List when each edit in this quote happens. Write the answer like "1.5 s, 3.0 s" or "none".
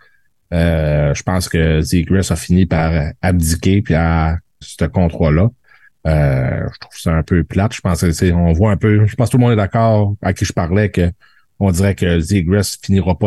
4.6 s